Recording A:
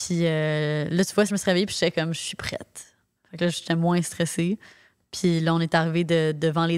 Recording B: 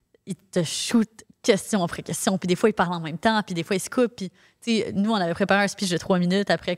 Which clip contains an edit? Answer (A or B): A